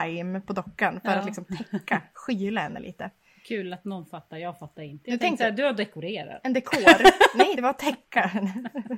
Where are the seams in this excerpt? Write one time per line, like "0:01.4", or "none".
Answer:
0:07.5